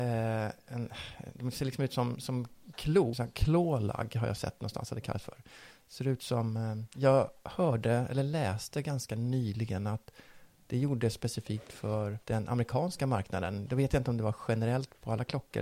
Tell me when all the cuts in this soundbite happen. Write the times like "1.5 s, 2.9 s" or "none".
3.1 s, 6.9 s, 12.2 s